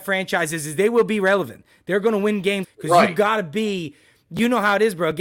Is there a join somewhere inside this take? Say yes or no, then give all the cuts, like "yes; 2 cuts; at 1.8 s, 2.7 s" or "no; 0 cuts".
yes; 1 cut; at 2.6 s